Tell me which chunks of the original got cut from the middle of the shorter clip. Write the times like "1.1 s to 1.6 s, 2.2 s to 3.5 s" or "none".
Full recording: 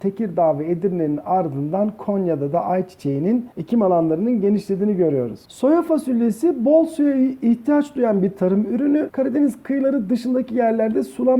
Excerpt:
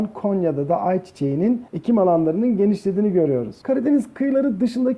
5.5 s to 9.1 s